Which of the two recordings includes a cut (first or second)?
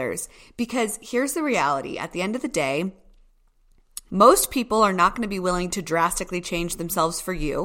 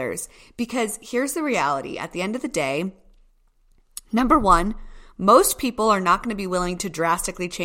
first